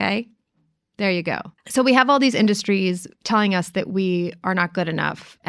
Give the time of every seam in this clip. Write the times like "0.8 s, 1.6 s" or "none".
1.6 s